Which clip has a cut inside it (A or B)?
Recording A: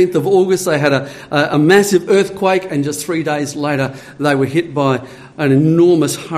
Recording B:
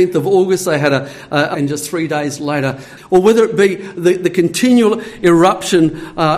B